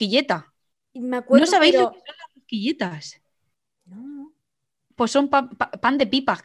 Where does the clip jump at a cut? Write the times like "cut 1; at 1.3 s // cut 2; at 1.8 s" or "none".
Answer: none